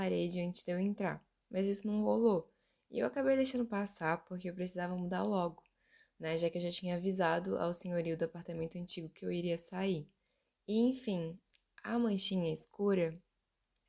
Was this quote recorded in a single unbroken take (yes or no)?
yes